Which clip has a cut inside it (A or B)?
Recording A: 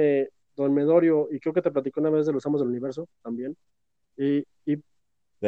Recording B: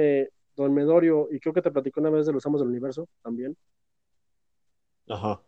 A